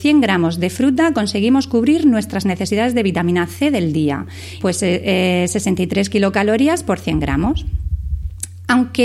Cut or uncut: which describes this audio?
cut